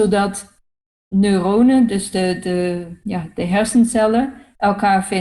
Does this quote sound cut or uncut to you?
uncut